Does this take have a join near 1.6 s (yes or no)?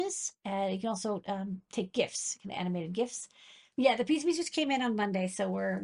no